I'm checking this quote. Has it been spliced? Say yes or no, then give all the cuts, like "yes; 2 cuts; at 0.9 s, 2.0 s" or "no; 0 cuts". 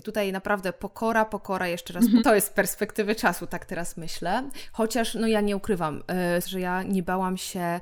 yes; 2 cuts; at 2.2 s, 6.4 s